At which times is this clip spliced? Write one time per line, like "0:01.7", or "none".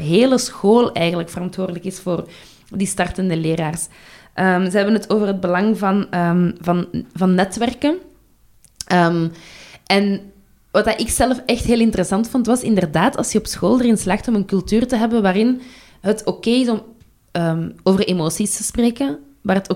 none